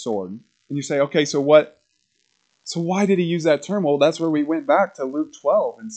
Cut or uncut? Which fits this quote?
uncut